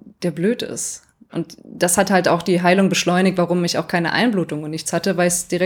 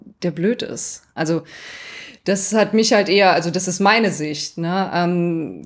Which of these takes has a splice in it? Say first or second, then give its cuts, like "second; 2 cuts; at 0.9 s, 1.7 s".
second; 1 cut; at 1.2 s